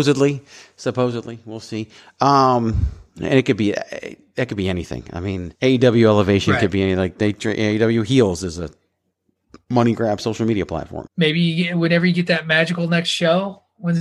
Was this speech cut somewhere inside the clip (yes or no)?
yes